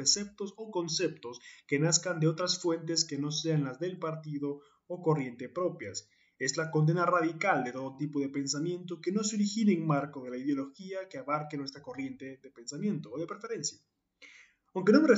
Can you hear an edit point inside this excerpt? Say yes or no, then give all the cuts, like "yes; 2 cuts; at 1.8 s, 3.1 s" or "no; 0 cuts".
no; 0 cuts